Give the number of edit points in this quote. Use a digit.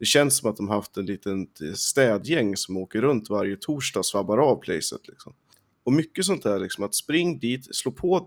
1